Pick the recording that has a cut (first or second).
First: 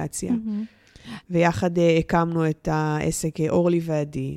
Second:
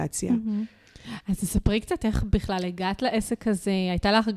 first